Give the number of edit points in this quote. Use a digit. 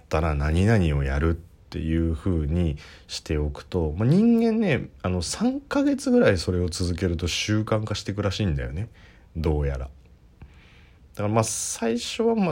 0